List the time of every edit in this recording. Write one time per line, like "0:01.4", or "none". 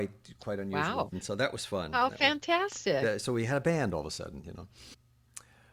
0:01.1